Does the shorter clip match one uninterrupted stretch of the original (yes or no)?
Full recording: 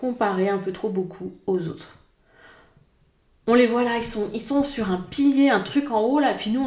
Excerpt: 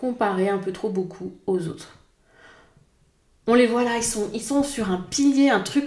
yes